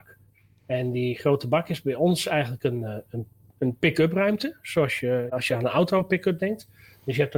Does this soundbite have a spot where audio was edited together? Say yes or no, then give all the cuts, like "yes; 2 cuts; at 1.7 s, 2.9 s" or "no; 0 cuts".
yes; 1 cut; at 5.3 s